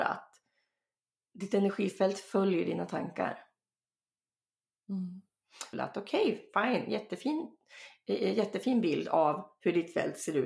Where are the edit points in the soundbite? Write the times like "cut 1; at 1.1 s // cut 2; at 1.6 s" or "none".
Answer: cut 1; at 5.7 s